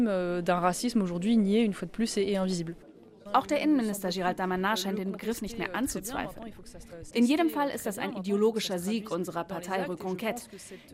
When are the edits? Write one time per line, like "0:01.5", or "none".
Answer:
0:03.3
0:07.1